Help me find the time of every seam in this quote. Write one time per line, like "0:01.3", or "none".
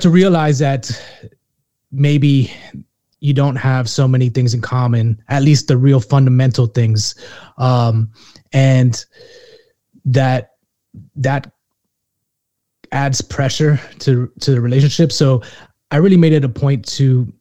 0:01.8